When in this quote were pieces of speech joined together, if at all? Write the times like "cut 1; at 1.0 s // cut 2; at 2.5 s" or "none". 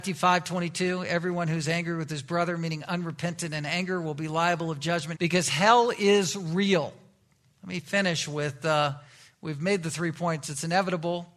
cut 1; at 5.1 s